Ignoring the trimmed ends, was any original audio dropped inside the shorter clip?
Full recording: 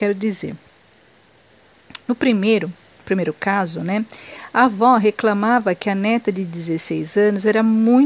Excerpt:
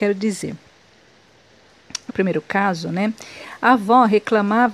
yes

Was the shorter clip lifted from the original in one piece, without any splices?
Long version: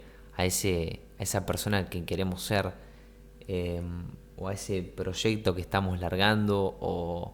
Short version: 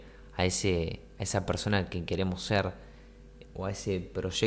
no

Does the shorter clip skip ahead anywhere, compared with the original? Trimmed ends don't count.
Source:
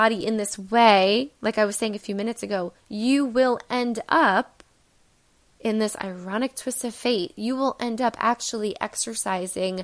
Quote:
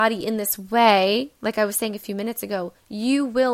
no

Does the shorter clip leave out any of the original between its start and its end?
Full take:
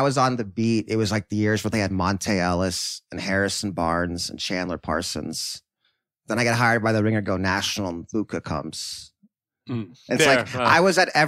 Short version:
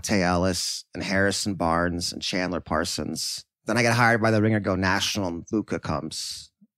yes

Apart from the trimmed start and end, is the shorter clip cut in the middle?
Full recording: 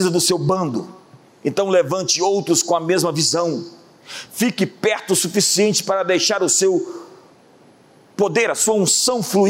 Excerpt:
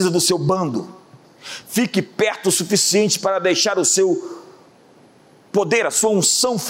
yes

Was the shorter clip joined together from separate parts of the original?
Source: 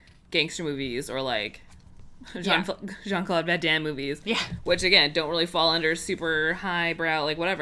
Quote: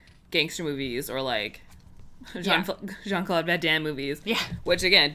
no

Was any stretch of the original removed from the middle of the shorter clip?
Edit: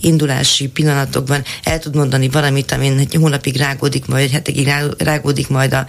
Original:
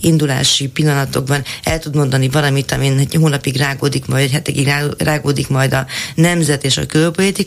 no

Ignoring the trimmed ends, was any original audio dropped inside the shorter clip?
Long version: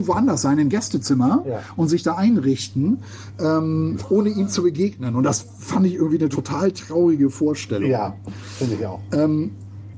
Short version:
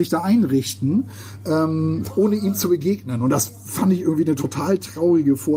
no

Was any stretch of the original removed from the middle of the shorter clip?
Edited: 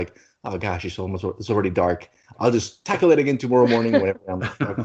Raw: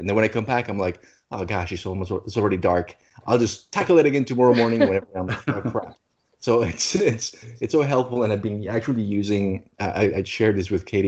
no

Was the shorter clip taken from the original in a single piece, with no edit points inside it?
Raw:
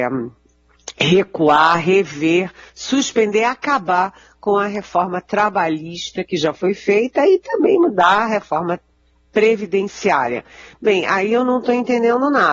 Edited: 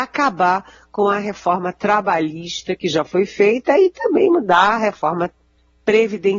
yes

